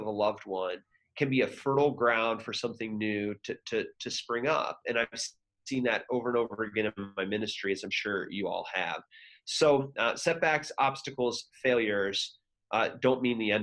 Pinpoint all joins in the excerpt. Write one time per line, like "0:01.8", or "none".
none

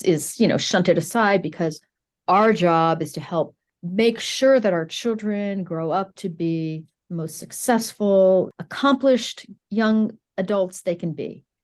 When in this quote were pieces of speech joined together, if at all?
none

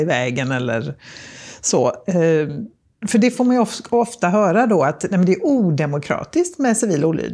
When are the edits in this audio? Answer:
0:03.0

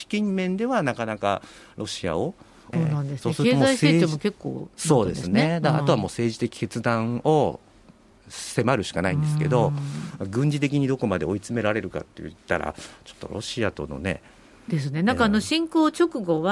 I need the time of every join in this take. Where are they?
0:02.7

